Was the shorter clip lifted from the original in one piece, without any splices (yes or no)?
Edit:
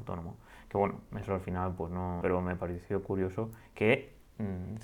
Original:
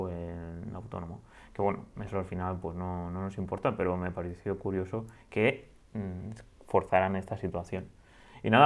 no